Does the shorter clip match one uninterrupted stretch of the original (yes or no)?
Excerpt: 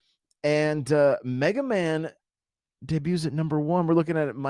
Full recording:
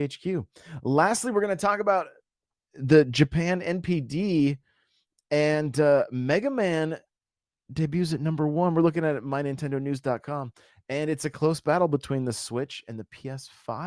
yes